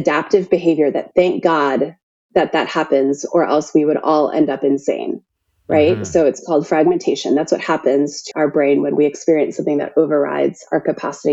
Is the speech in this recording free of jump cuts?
no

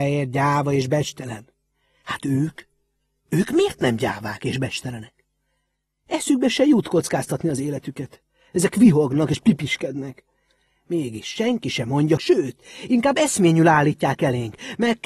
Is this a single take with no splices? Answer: no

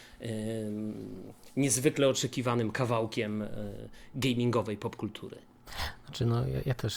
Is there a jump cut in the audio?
no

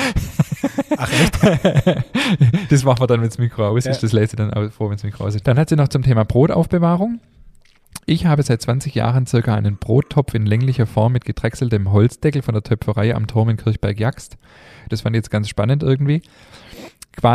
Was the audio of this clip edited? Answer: yes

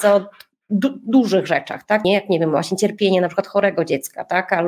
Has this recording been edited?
yes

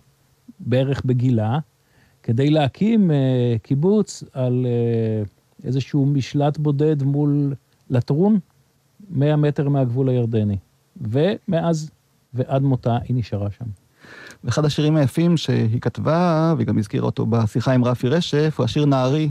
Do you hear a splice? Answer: no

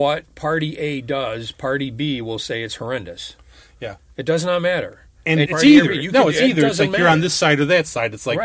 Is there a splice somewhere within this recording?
yes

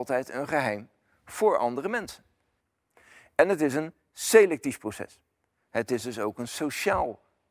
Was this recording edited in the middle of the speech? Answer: yes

